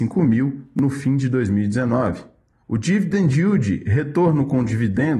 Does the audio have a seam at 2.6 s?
yes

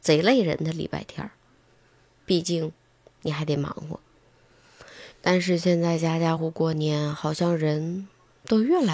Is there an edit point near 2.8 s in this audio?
no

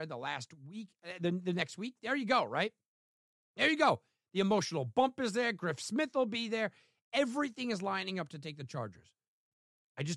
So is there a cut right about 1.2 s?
yes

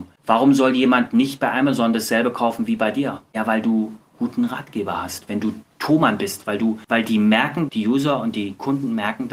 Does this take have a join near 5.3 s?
yes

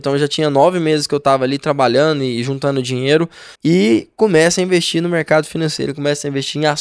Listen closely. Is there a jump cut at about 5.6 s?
no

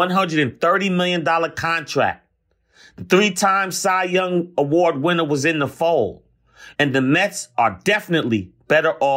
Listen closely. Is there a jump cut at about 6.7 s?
yes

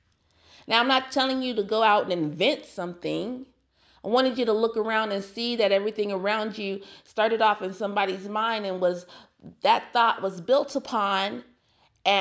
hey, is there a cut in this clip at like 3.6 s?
no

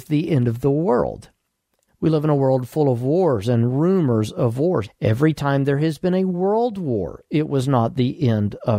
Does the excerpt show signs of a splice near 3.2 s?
no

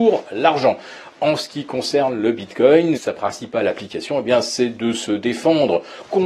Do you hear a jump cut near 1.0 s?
no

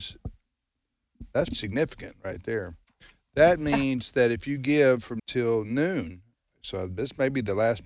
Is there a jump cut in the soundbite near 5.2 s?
yes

